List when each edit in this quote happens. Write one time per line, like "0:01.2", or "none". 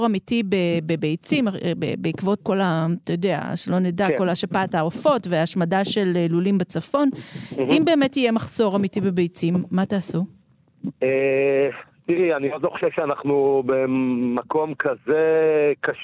0:02.4